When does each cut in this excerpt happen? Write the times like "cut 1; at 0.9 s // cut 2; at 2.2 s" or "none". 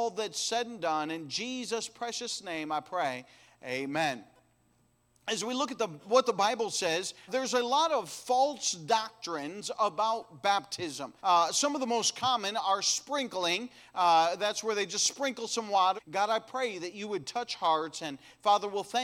cut 1; at 7.3 s // cut 2; at 11.2 s // cut 3; at 16.0 s